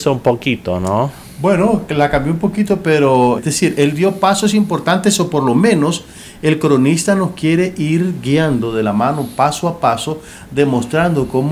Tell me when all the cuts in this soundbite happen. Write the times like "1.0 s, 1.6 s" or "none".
3.4 s